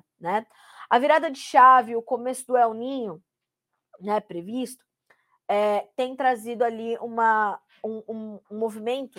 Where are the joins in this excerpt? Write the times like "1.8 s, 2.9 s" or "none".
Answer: none